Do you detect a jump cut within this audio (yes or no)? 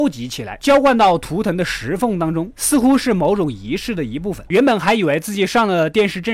yes